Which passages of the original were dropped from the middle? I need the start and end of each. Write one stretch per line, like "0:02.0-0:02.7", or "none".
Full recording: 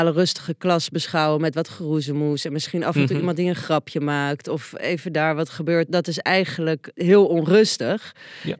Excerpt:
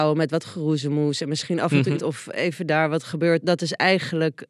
0:03.2-0:04.4